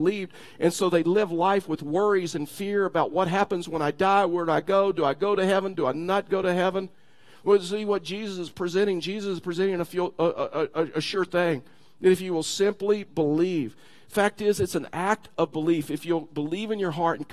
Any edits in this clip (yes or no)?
no